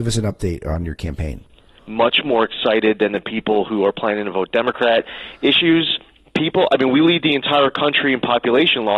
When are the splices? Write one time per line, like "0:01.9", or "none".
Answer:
0:01.8

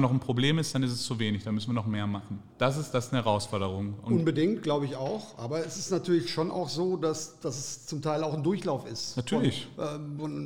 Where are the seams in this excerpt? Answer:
0:02.5

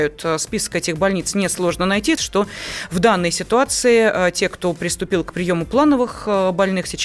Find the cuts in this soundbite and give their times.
0:02.2

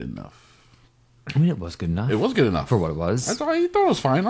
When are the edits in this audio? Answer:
none

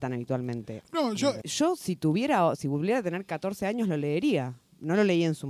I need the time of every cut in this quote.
0:01.4

